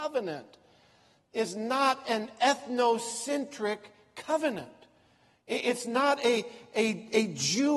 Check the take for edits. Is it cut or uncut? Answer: uncut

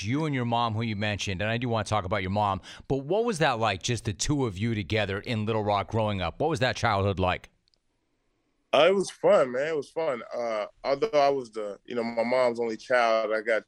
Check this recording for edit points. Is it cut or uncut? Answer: uncut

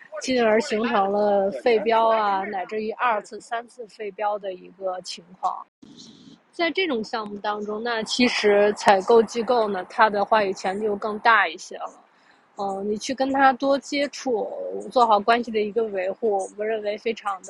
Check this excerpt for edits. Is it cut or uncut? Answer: uncut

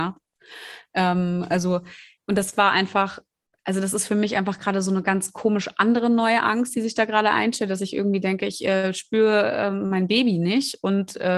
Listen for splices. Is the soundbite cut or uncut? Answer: uncut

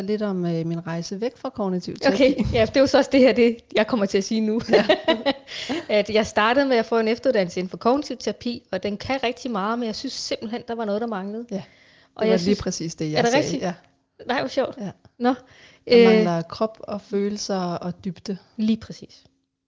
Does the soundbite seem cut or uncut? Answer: uncut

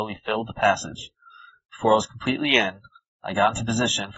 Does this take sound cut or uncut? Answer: uncut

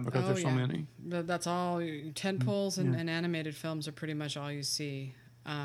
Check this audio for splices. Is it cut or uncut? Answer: uncut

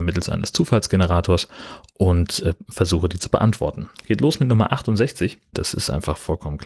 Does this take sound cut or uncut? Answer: cut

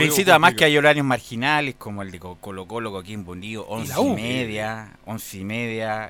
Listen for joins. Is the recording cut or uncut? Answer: uncut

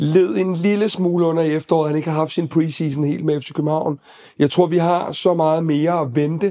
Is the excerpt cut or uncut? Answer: uncut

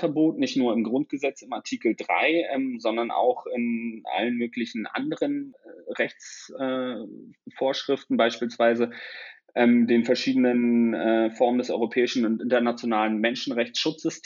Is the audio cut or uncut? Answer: uncut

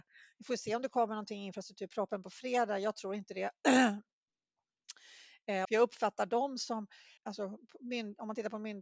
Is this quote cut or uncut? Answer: cut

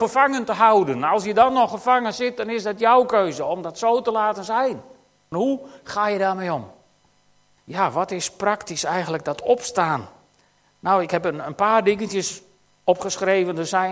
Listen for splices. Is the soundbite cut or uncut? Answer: cut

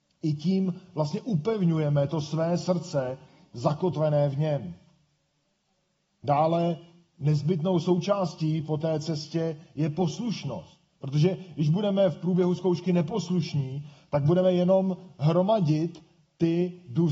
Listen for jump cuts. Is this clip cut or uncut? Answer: uncut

